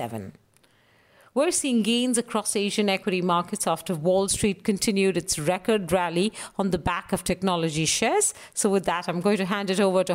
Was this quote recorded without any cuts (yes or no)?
yes